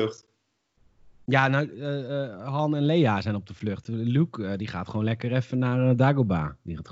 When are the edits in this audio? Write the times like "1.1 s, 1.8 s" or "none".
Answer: none